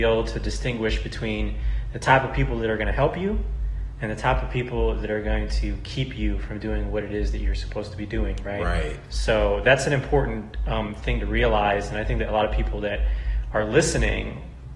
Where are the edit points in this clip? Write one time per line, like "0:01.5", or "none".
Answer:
none